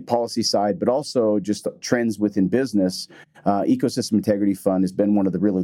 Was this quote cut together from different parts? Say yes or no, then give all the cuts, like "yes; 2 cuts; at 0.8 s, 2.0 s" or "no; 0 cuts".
no; 0 cuts